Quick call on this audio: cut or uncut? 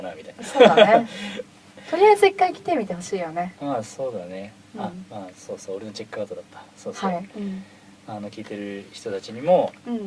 cut